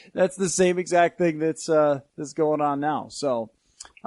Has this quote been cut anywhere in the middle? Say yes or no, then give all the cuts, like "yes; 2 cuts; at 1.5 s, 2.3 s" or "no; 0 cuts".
no; 0 cuts